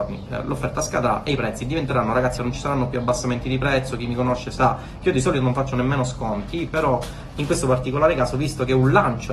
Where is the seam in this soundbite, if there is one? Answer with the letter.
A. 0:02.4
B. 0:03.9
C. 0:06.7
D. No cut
A